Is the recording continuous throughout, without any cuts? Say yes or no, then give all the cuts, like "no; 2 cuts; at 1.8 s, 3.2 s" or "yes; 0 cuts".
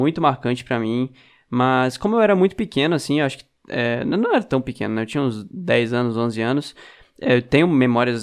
yes; 0 cuts